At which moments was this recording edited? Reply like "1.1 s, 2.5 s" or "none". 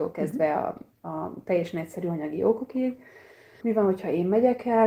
3.6 s